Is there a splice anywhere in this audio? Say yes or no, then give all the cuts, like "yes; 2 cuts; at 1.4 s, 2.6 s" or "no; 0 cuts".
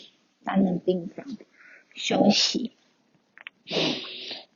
no; 0 cuts